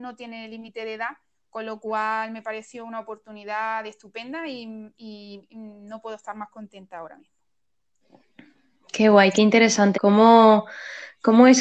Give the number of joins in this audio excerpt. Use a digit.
1